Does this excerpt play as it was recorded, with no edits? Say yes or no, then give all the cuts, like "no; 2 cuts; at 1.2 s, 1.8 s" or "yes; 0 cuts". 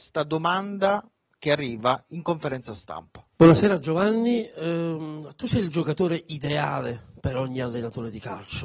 no; 1 cut; at 3.3 s